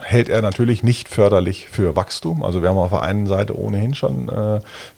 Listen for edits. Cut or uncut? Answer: uncut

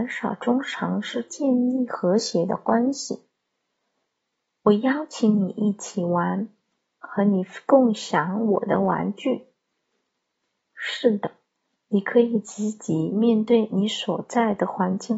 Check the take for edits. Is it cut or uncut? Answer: uncut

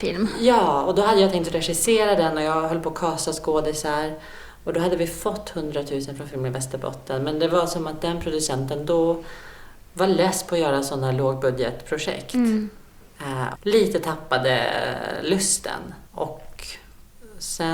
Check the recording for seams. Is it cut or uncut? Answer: cut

